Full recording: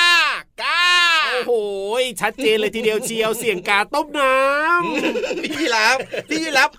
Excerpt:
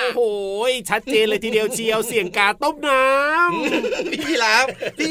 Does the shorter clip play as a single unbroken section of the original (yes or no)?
yes